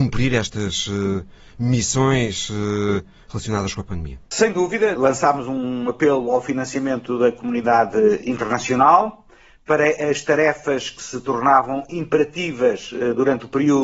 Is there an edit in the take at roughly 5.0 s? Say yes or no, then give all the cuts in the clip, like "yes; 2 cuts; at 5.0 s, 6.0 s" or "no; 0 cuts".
yes; 1 cut; at 5.0 s